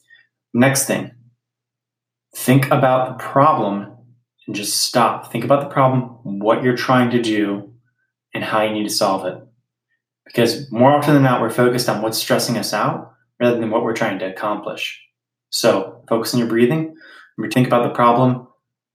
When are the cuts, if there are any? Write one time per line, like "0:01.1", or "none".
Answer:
0:16.0
0:17.5